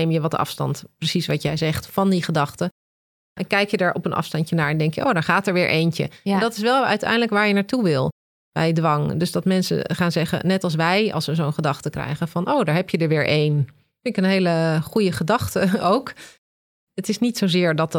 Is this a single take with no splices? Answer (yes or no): no